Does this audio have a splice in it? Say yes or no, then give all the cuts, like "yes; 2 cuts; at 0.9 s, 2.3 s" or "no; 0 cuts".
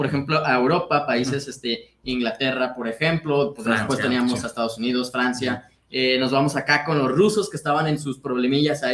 no; 0 cuts